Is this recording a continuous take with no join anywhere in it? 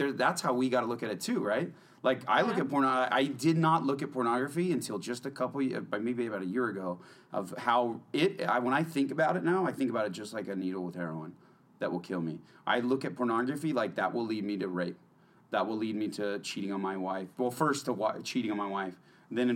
yes; 0 cuts

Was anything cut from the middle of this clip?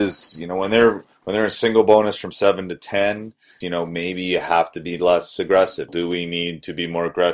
yes; 2 cuts; at 3.6 s, 5.9 s

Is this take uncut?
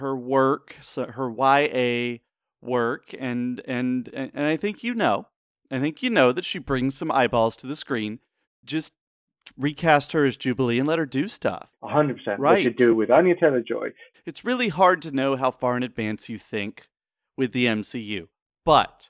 no; 3 cuts; at 8.4 s, 11.7 s, 14.1 s

